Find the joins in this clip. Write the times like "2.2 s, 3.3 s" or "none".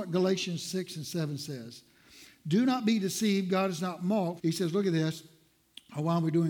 4.4 s